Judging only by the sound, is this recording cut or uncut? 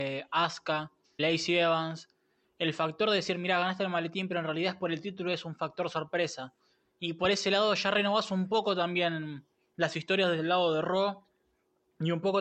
cut